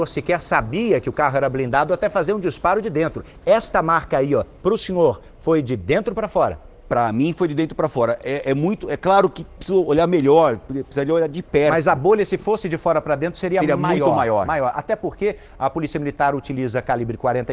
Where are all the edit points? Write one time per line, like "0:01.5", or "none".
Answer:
none

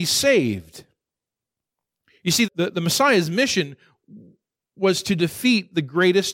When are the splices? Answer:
0:02.5

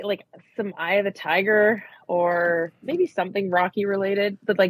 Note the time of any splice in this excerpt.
none

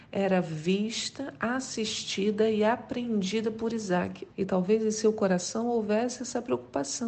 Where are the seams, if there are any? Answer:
0:04.3

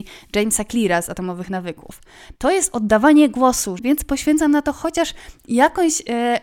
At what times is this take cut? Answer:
0:02.4
0:03.8

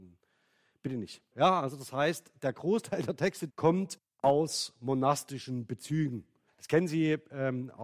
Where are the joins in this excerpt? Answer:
0:01.3
0:03.5
0:06.5

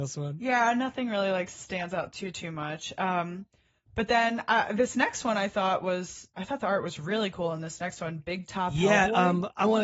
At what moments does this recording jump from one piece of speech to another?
none

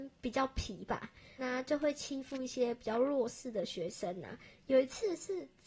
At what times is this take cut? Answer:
0:01.4

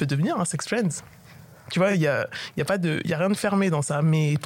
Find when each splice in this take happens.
none

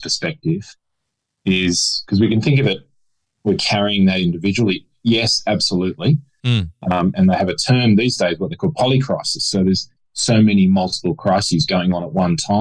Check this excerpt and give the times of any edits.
0:07.1

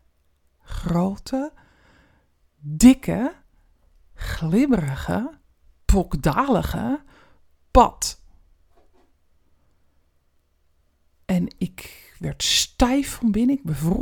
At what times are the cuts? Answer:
none

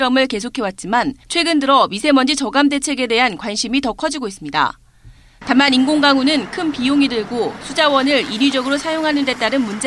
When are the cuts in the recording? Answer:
0:01.2

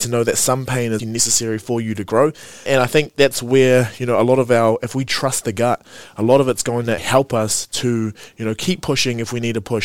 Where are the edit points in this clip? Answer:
0:01.0
0:02.7
0:07.0

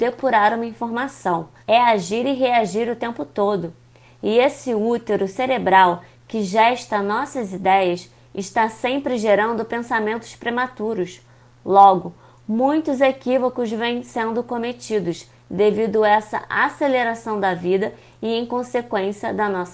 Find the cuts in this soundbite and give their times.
0:01.6

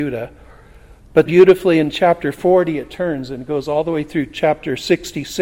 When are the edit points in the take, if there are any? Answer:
0:01.3

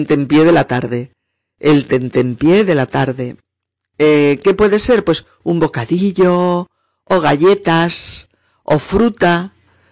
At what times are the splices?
none

